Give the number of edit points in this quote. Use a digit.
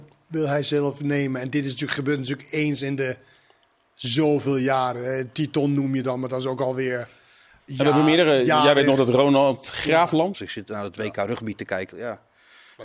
2